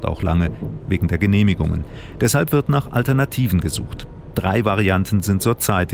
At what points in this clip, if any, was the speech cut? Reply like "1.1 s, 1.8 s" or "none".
none